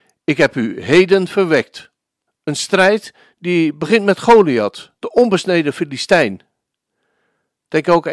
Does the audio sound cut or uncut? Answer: cut